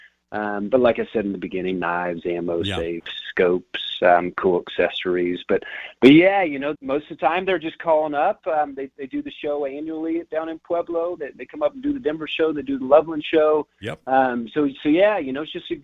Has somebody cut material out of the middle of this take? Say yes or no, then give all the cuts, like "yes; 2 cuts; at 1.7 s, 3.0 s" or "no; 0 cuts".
yes; 1 cut; at 6.7 s